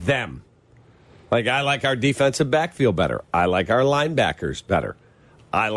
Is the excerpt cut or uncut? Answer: uncut